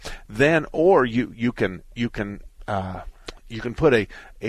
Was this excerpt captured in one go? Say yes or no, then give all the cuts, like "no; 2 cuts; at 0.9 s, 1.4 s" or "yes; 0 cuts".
yes; 0 cuts